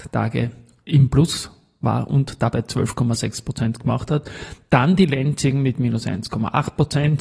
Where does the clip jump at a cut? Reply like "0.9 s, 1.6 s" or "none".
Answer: none